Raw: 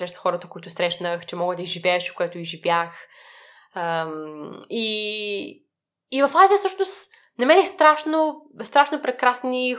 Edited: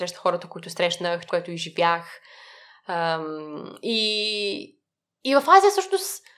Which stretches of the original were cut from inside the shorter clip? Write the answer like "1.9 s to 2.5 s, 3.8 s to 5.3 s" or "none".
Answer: 1.3 s to 2.1 s